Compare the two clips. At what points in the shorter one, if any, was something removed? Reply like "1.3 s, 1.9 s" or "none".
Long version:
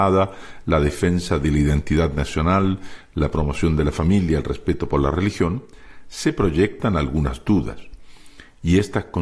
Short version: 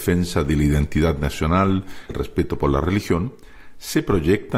2.1 s